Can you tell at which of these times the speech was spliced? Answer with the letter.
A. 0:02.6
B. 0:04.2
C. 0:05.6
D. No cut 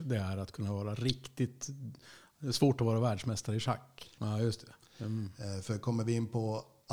B